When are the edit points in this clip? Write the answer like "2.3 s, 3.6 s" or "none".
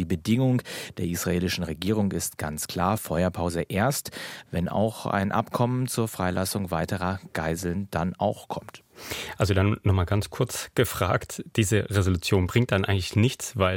none